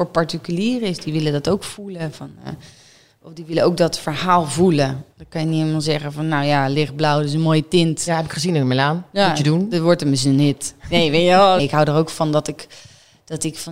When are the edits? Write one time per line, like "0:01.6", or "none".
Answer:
0:11.6